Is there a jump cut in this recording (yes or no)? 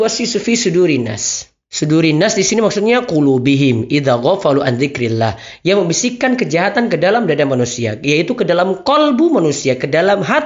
no